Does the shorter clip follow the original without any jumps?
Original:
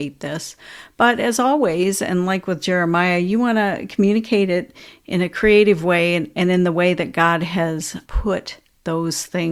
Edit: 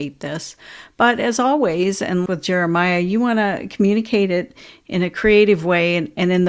no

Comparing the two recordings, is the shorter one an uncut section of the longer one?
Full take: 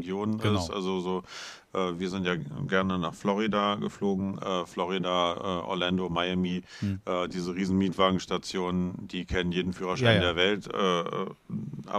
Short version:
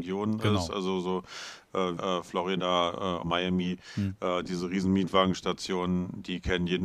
no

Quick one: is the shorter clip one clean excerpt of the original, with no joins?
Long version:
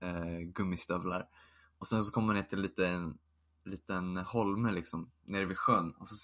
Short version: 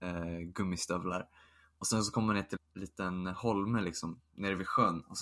no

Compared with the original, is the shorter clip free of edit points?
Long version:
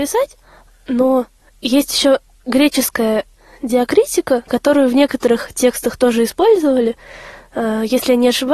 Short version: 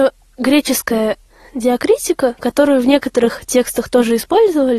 yes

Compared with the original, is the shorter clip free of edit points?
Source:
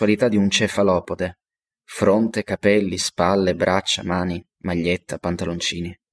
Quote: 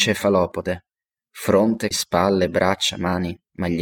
no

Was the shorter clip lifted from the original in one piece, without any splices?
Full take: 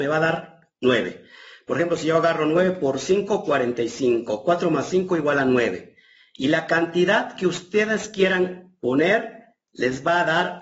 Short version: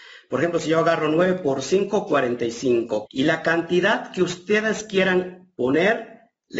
no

